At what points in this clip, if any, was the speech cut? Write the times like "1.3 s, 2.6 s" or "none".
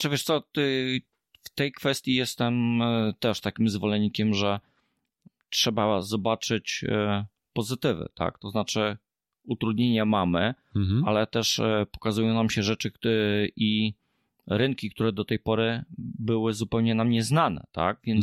none